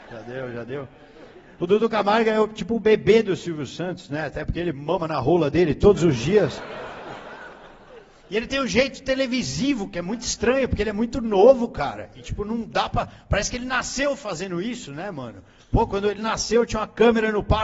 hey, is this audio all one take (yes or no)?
yes